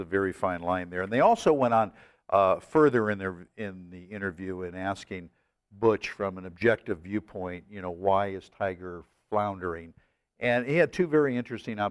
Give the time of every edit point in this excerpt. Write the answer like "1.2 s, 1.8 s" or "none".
none